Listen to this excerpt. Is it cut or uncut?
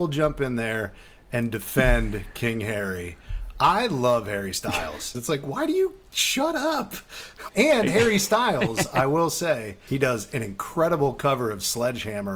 cut